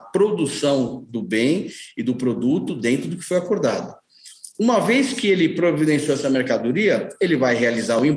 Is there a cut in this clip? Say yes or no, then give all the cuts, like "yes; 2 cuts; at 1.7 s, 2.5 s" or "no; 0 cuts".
no; 0 cuts